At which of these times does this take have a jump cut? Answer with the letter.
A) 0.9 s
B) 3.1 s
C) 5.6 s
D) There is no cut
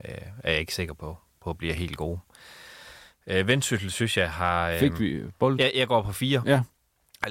C